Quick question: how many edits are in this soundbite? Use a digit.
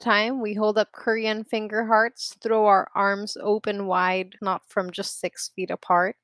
1